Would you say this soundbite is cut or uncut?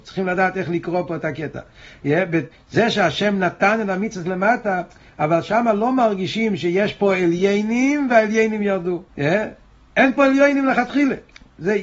cut